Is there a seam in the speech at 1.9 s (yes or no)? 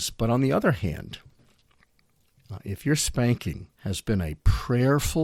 no